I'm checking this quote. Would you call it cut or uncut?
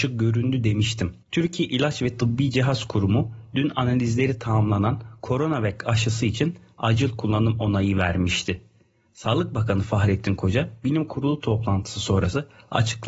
cut